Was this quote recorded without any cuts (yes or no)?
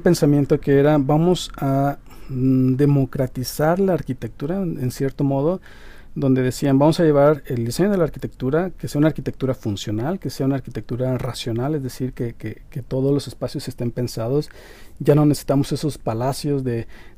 yes